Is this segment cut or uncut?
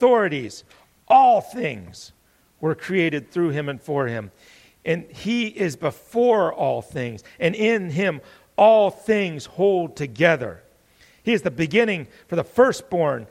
cut